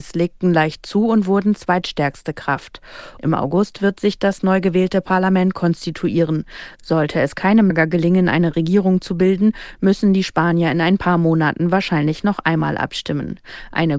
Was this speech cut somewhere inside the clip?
yes; 2 cuts; at 3.2 s, 7.7 s

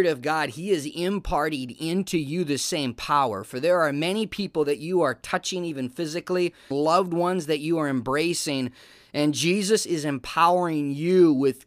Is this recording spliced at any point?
yes; 1 cut; at 6.7 s

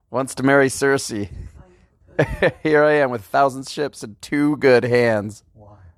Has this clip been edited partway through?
no; 0 cuts

